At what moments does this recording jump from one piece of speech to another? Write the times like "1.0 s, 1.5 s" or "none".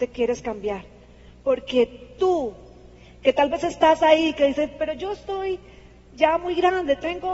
none